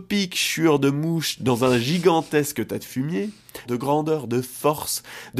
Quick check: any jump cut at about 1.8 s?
no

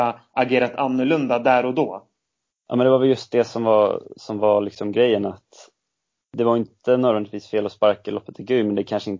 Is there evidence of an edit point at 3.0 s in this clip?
no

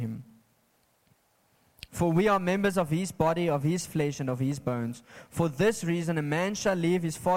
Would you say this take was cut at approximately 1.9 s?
yes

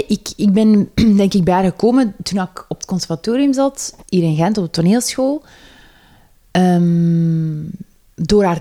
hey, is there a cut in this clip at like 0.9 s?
yes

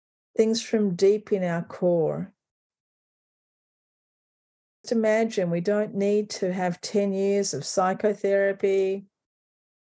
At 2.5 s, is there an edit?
no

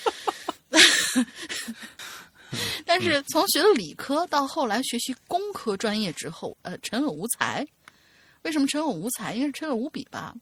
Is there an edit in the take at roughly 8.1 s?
no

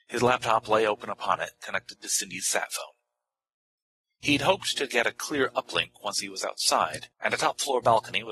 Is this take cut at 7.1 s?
yes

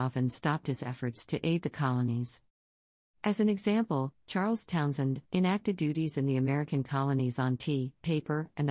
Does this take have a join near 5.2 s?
yes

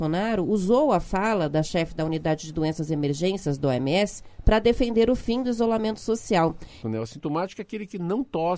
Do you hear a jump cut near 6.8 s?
yes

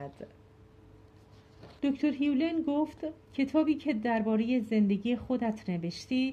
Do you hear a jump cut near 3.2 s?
yes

